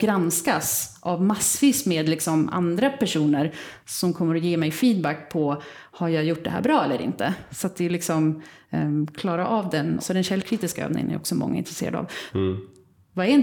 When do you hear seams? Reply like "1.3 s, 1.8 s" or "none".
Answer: 10.0 s, 12.3 s